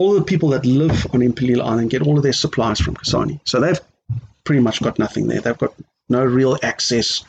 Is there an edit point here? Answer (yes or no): no